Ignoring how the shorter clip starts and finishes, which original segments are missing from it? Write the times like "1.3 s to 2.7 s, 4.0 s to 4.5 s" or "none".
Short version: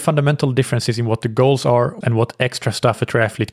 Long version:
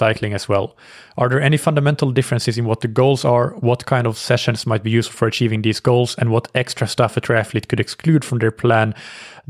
3.6 s to 6.2 s